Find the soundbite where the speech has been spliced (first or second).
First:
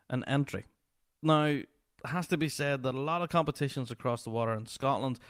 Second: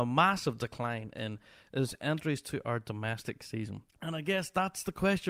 second